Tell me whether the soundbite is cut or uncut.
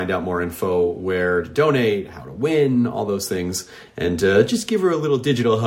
uncut